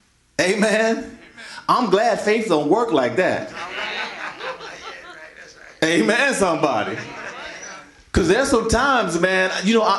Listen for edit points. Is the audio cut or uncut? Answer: uncut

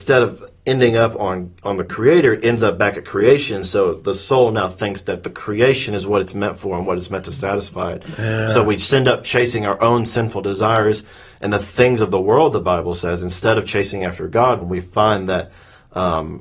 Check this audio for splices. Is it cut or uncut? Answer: cut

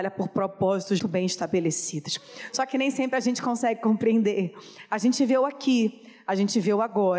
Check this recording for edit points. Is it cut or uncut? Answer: cut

